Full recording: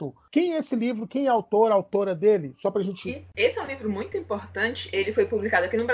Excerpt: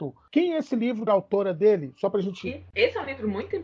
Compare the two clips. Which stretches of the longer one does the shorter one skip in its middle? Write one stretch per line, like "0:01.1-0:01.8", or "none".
0:01.1-0:01.7